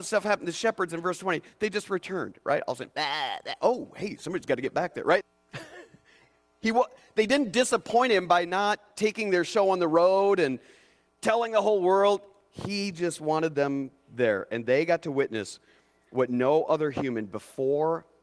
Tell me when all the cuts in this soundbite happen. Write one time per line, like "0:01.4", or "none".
0:05.2